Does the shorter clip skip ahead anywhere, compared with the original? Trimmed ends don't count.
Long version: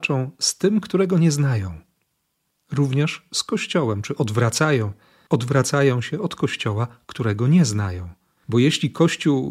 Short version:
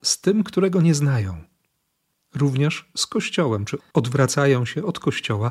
yes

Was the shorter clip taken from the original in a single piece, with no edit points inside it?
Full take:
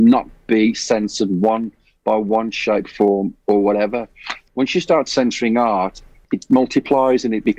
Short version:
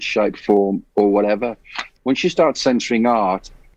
yes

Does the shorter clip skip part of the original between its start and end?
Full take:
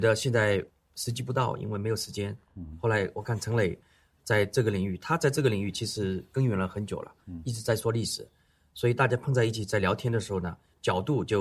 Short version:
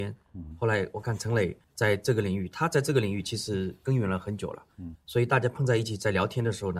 yes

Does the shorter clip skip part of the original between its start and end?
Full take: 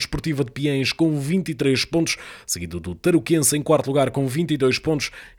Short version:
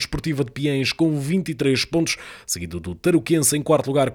no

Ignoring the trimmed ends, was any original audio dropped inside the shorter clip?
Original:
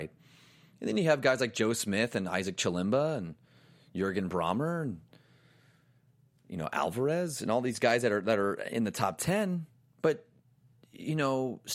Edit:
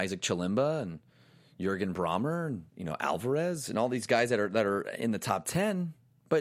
yes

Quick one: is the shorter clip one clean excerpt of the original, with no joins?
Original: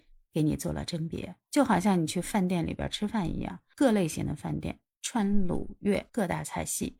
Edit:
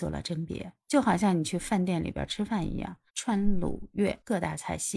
no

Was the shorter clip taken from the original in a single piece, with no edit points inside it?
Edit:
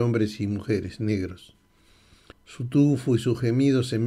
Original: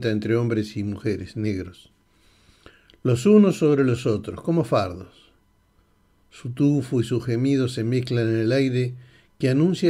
no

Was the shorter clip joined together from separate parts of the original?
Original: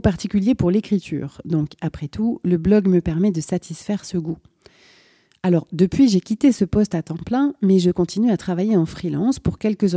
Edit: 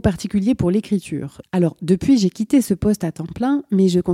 yes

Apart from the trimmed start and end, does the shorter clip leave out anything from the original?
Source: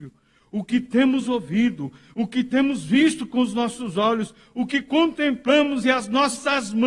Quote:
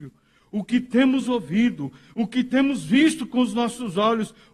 no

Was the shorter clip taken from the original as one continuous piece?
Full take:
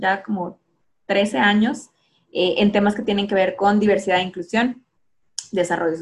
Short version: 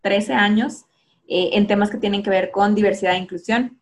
yes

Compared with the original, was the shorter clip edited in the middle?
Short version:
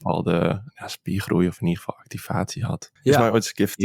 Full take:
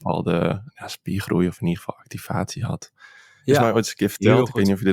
yes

